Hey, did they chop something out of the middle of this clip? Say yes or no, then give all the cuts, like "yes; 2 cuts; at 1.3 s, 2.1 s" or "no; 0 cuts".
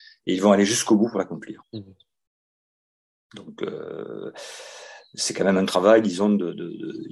yes; 1 cut; at 1.6 s